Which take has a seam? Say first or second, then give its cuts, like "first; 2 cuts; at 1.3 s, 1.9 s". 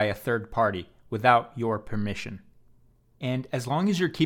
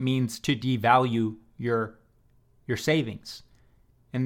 first; 1 cut; at 3.1 s